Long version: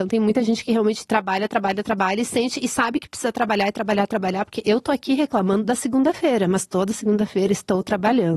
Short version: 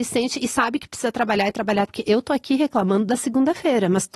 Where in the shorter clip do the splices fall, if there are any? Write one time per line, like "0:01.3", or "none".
0:01.9